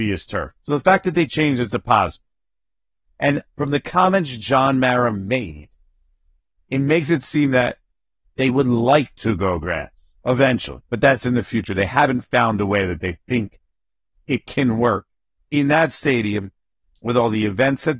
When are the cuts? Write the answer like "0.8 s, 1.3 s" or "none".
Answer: none